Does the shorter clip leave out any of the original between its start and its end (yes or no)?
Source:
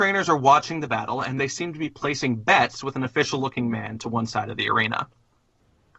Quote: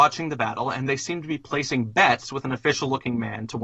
no